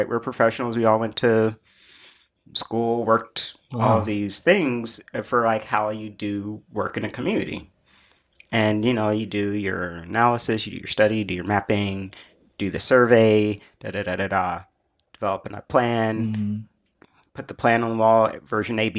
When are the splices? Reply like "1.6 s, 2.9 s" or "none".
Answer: none